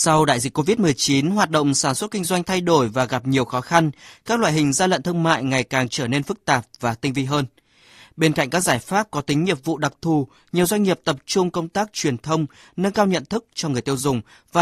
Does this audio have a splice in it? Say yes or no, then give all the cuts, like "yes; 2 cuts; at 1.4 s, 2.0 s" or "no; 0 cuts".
no; 0 cuts